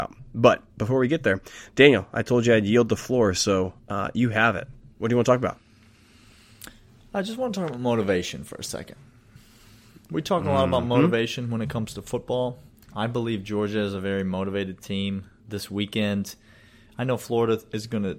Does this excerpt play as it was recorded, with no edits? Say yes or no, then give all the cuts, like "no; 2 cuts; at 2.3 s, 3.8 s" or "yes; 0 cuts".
no; 1 cut; at 12.9 s